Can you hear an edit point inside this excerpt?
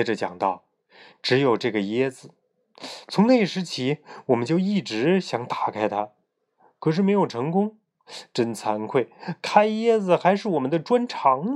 no; 0 cuts

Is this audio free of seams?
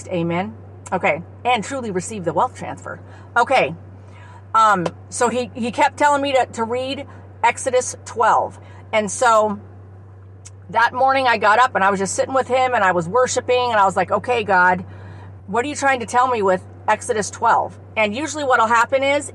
no; 2 cuts; at 15.4 s, 17.9 s

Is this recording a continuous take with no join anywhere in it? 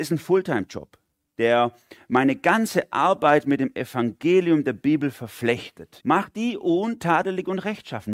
no; 1 cut; at 6.0 s

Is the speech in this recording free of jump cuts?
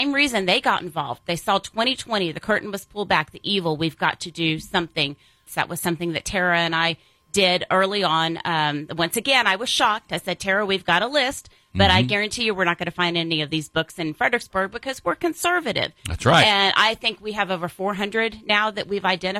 no; 1 cut; at 5.5 s

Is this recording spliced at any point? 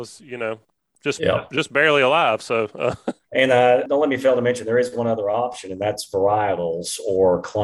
yes; 1 cut; at 3.2 s

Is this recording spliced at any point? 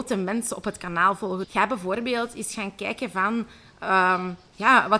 yes; 1 cut; at 1.4 s

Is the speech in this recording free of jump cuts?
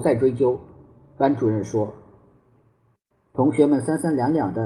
yes; 0 cuts

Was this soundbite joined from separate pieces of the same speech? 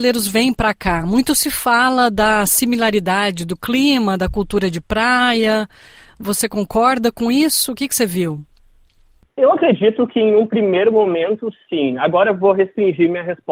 no; 0 cuts

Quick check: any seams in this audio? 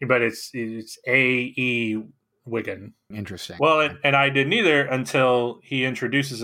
yes; 1 cut; at 3.1 s

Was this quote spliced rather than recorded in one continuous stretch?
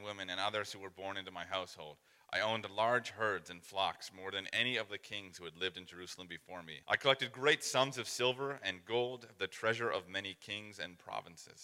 yes; 1 cut; at 6.8 s

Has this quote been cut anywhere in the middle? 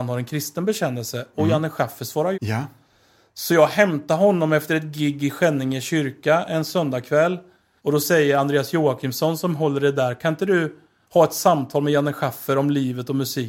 yes; 2 cuts; at 2.3 s, 7.8 s

